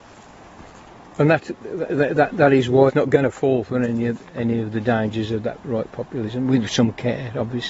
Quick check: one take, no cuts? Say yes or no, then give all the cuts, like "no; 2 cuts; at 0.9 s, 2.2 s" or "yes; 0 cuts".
no; 2 cuts; at 1.9 s, 5.6 s